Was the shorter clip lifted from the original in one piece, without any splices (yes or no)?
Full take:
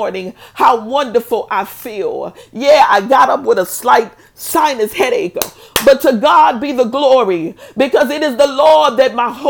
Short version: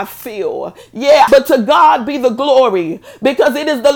no